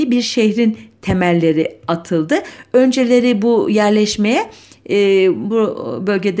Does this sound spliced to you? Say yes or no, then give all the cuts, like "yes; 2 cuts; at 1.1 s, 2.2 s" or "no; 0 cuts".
no; 0 cuts